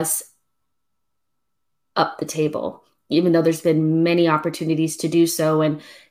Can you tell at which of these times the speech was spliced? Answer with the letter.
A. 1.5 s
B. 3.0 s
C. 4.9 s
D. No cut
D